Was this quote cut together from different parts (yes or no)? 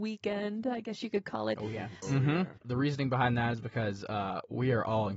yes